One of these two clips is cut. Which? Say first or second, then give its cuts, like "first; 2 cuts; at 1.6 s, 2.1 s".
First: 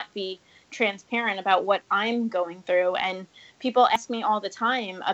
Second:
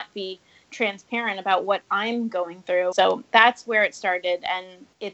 second; 1 cut; at 2.9 s